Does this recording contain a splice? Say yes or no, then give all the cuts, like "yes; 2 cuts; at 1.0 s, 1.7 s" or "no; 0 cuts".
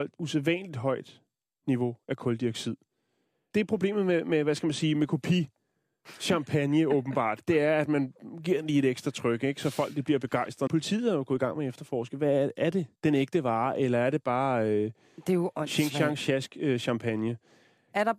yes; 2 cuts; at 10.7 s, 13.0 s